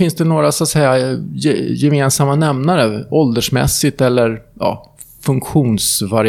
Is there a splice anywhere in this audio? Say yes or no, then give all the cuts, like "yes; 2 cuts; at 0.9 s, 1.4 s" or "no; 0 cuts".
no; 0 cuts